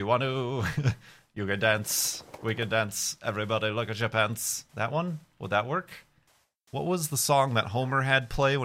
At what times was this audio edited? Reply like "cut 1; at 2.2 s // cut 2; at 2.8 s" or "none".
none